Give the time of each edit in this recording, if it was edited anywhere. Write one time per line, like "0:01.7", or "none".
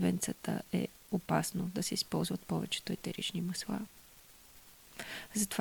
none

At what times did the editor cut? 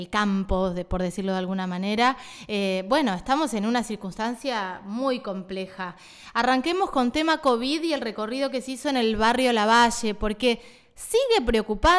none

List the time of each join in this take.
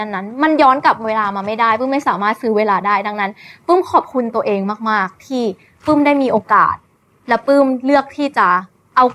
none

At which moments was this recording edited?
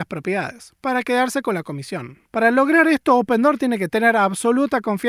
0:02.2

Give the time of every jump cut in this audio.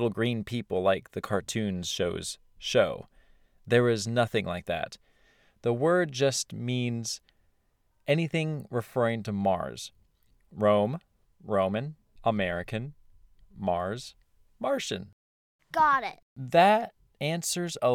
0:12.2
0:16.2

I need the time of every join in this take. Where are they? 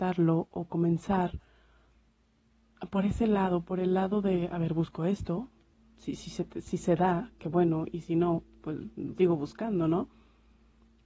0:09.2

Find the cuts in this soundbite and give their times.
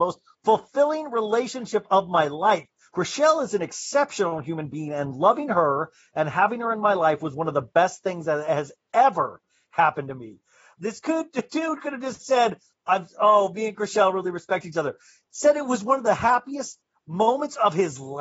0:02.9
0:10.8

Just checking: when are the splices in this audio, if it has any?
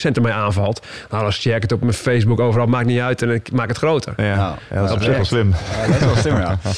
none

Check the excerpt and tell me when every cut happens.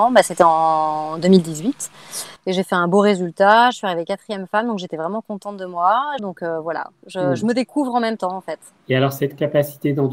0:06.2

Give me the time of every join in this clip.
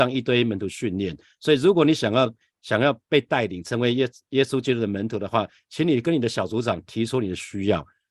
none

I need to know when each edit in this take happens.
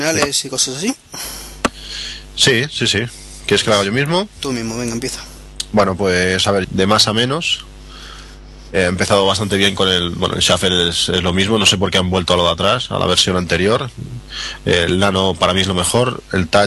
0:06.6

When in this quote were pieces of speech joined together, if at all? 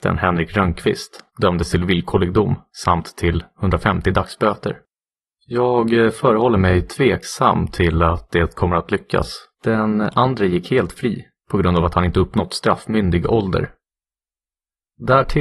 0:01.3
0:05.4
0:09.5

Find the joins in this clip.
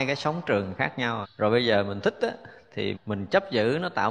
0:01.2
0:02.9

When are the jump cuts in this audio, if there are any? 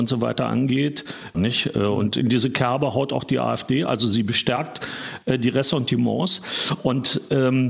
0:01.3

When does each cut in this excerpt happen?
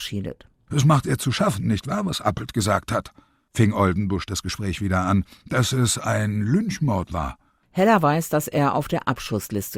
none

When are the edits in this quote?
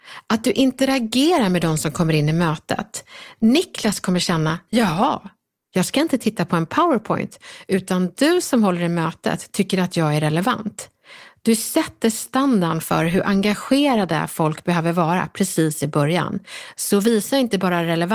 0:03.4

